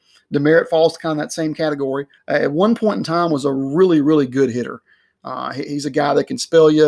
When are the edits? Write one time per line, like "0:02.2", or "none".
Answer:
0:02.2